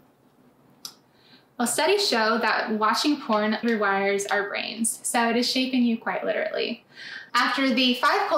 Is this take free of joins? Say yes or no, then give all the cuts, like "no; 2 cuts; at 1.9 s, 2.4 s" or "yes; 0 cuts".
no; 2 cuts; at 3.6 s, 7.3 s